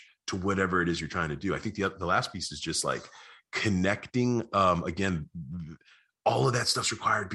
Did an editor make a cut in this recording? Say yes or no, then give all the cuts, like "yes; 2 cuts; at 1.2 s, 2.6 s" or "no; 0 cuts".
no; 0 cuts